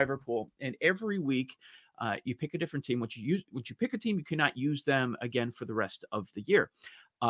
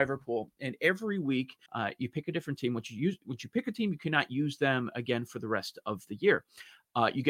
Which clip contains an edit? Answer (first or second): second